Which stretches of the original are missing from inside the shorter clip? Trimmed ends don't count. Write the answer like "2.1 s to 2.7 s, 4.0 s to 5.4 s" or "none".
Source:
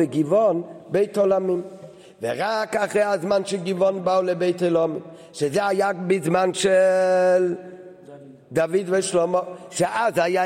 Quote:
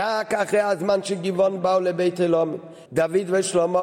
5.3 s to 8.4 s